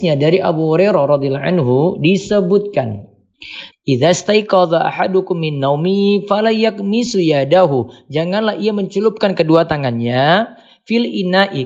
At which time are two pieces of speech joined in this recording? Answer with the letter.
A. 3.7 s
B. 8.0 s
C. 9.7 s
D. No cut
A